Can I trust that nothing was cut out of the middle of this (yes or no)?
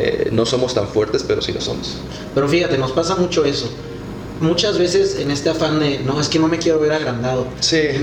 yes